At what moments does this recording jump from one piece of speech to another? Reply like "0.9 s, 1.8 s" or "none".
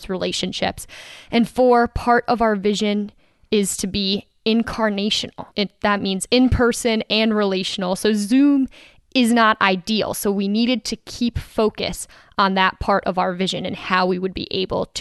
5.5 s